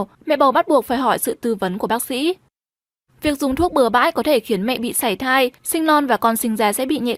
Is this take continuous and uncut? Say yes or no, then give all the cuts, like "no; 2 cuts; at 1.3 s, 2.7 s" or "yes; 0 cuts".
yes; 0 cuts